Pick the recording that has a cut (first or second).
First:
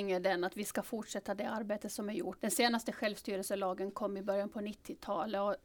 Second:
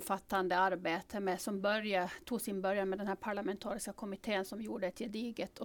first